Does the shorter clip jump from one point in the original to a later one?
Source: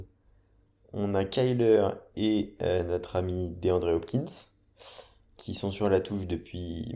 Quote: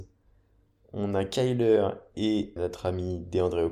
yes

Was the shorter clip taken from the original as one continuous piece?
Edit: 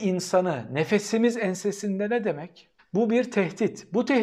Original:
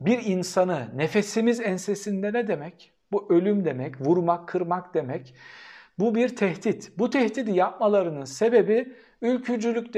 no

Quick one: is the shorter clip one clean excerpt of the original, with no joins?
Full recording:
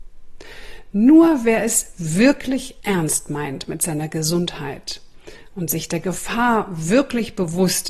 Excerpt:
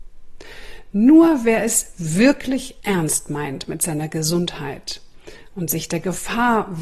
yes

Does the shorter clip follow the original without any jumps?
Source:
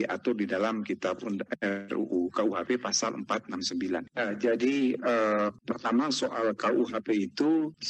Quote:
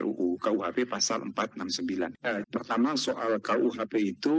no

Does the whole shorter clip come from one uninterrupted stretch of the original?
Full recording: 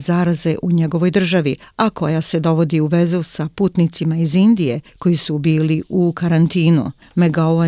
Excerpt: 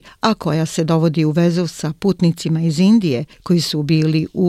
yes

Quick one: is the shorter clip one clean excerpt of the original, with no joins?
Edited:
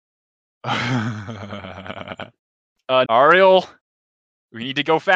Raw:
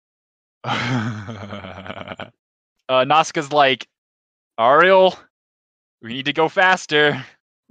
no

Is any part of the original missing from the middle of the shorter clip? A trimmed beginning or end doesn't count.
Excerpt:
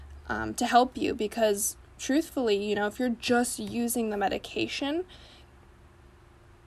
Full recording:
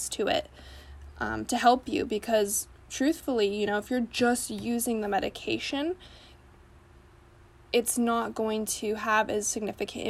no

